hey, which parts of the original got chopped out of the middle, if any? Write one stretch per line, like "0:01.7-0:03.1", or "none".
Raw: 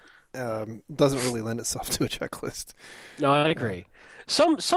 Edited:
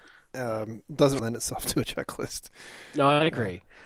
0:01.2-0:01.4